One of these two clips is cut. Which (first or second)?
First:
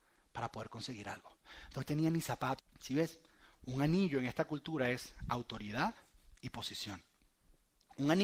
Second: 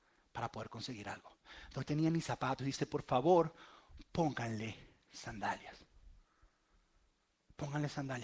first